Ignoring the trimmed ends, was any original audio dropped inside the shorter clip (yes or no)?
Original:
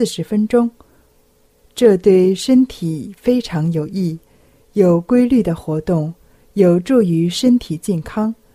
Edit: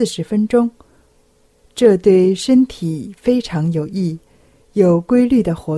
no